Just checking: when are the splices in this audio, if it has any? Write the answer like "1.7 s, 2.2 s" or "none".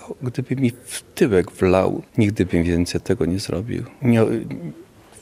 2.1 s, 4.0 s